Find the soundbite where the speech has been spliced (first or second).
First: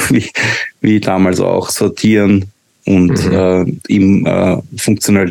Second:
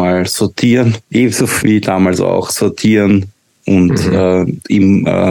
second